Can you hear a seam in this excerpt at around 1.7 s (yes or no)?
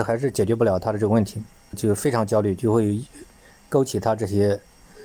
yes